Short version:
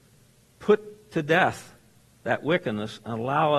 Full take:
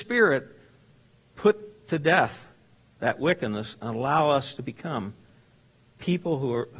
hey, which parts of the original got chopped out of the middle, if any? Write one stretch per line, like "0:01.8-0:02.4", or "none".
none